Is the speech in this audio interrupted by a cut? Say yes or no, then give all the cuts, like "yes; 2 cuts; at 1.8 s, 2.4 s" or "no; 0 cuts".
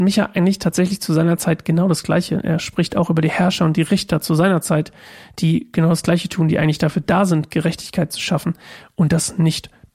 no; 0 cuts